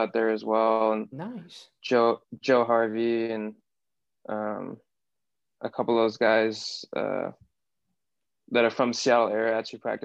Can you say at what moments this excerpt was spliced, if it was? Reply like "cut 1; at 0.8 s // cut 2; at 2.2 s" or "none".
none

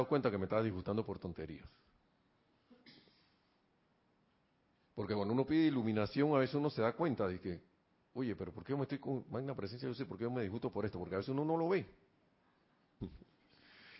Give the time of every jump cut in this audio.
cut 1; at 13.0 s

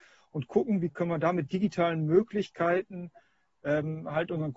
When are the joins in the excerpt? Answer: none

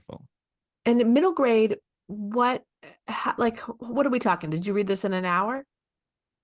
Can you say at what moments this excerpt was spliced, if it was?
none

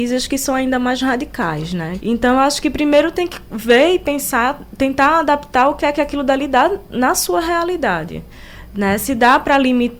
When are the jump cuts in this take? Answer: cut 1; at 2.0 s

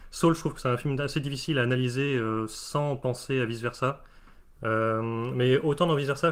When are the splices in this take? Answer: cut 1; at 4.5 s

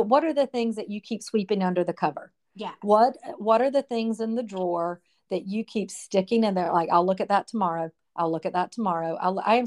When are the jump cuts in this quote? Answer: none

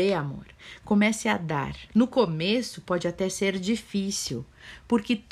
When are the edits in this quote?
cut 1; at 1.9 s

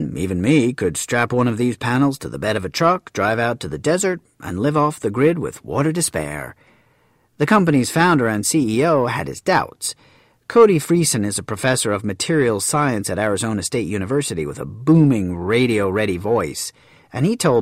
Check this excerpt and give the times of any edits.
none

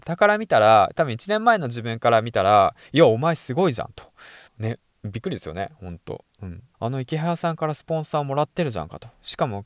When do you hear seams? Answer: cut 1; at 4.5 s // cut 2; at 6.7 s

